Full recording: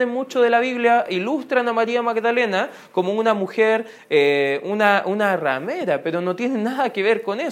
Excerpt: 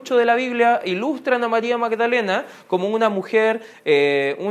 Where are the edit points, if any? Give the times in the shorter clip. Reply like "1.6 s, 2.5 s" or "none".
none